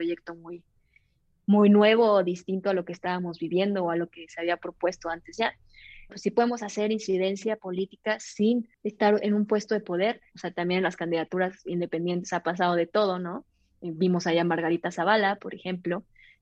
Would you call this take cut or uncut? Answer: cut